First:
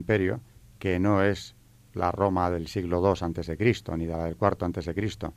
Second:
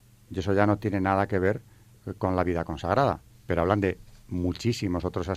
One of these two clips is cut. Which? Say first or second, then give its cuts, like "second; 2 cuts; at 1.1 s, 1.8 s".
second; 1 cut; at 3.3 s